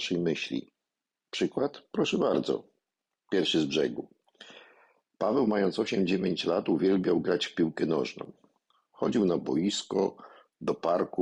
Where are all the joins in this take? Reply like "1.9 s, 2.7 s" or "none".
none